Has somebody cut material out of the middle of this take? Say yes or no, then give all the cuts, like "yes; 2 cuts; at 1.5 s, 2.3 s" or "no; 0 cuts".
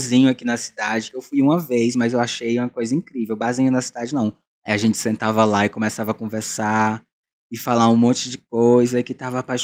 yes; 1 cut; at 4.6 s